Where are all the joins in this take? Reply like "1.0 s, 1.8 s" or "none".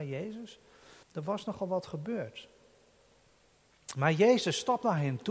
1.0 s